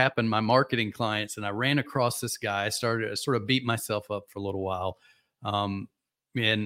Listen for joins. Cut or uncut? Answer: uncut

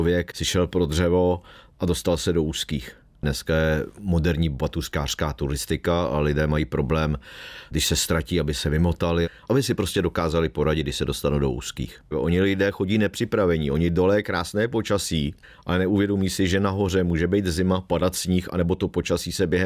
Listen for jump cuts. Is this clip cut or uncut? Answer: cut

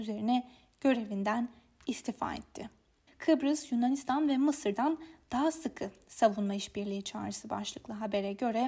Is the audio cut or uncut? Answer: cut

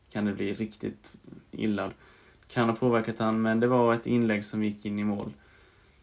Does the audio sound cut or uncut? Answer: cut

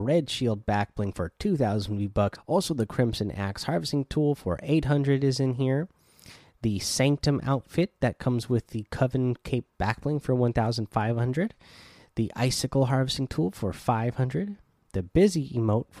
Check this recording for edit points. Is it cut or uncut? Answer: cut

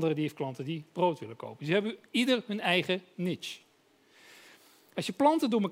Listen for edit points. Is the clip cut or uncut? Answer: uncut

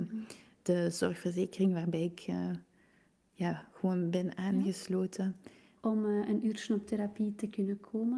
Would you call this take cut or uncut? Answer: cut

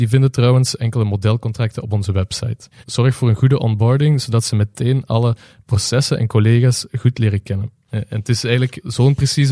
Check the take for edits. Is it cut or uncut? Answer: cut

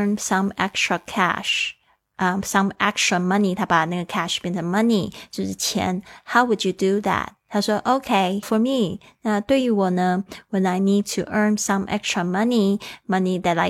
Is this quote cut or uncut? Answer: cut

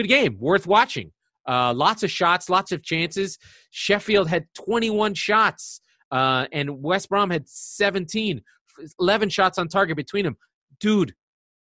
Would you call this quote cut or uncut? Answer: uncut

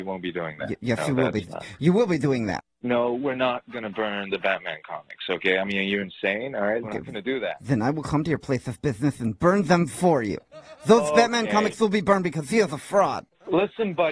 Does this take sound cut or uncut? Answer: cut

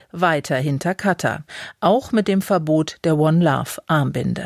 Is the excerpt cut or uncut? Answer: uncut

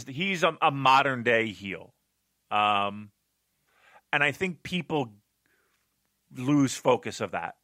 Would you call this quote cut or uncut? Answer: uncut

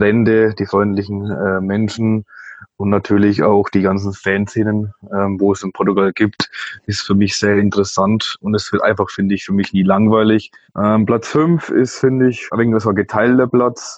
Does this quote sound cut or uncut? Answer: cut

